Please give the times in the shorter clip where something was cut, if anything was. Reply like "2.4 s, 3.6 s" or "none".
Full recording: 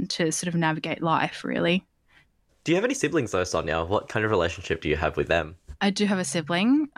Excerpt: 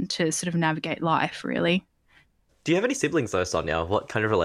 none